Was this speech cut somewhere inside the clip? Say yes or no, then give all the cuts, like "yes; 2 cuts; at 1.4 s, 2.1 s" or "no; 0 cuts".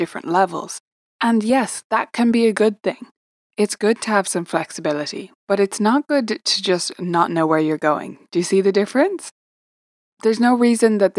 yes; 1 cut; at 5.4 s